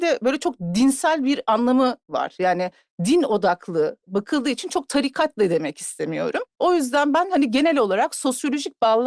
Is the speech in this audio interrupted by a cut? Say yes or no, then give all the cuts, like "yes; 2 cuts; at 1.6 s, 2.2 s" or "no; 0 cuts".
no; 0 cuts